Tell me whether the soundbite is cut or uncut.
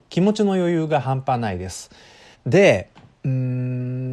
cut